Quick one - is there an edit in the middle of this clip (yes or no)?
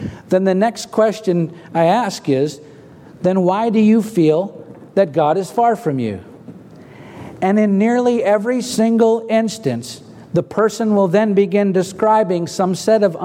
no